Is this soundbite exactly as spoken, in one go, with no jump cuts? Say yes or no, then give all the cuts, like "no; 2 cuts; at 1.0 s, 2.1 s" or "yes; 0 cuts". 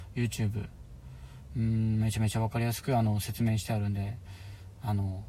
yes; 0 cuts